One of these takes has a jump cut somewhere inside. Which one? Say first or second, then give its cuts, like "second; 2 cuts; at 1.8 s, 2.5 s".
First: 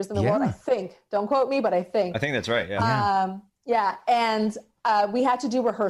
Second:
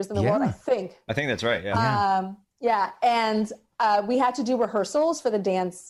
second; 1 cut; at 1.1 s